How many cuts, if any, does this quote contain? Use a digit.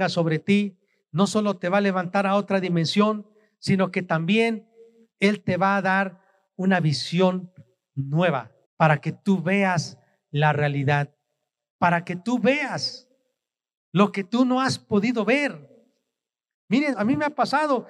2